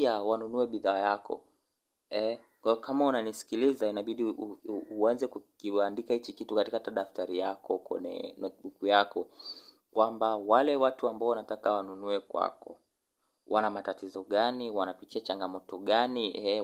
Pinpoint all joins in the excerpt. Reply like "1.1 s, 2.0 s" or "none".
4.6 s